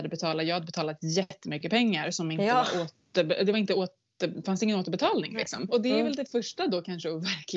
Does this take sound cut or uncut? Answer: cut